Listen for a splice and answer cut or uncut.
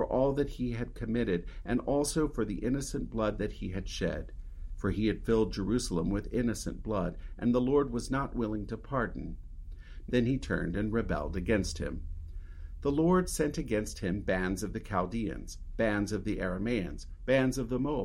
cut